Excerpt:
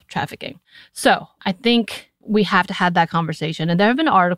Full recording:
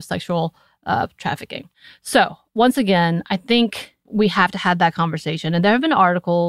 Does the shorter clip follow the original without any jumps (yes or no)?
no